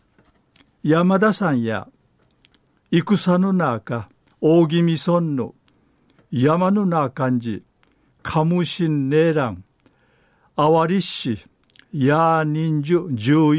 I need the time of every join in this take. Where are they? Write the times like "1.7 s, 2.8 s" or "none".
none